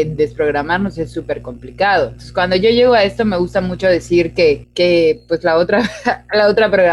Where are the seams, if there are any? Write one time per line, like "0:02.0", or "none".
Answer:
none